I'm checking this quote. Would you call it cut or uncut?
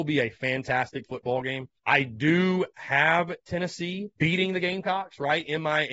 cut